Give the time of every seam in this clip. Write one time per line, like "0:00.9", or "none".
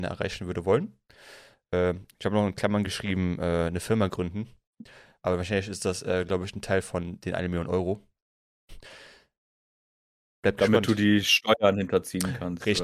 none